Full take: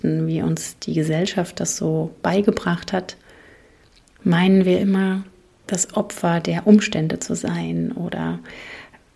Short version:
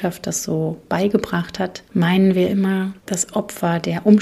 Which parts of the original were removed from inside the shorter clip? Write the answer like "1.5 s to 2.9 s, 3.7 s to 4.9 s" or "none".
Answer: 3.2 s to 4.2 s, 5.3 s to 5.6 s